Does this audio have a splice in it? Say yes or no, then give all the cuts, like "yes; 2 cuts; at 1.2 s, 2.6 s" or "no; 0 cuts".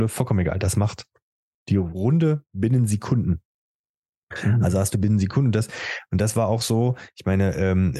no; 0 cuts